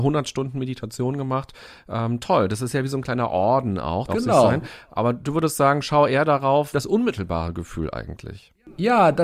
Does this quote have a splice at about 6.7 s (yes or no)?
yes